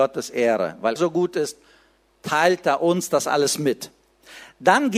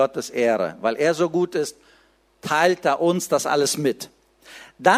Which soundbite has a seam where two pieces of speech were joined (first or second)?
first